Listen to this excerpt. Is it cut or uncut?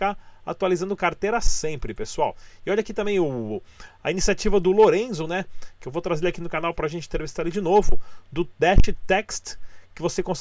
uncut